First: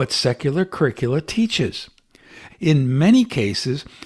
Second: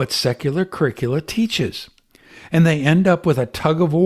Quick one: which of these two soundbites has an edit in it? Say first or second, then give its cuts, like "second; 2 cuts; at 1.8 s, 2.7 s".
first; 1 cut; at 2.5 s